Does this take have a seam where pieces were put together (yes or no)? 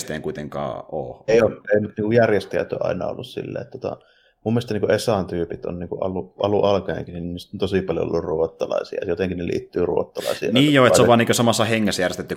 no